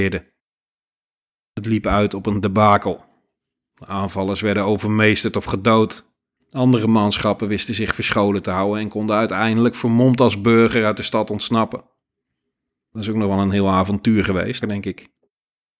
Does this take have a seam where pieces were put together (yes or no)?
yes